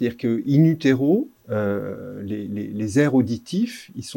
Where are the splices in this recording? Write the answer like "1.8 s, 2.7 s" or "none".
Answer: 1.4 s

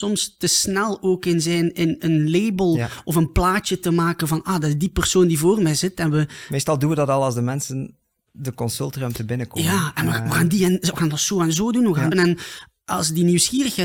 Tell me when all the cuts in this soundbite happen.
12.1 s

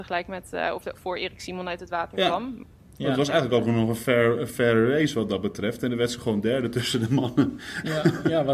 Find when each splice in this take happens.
none

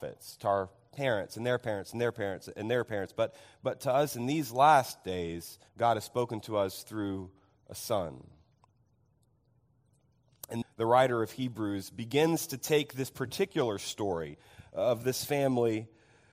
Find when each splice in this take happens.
5.7 s, 10.6 s

